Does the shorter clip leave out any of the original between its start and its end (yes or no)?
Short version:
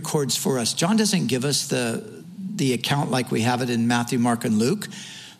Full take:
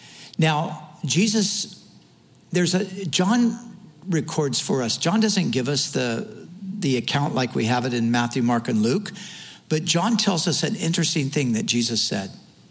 no